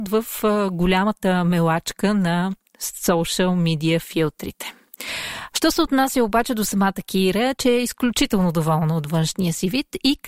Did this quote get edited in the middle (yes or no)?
yes